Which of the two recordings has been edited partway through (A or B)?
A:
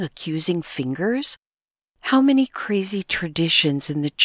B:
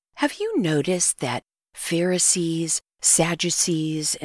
A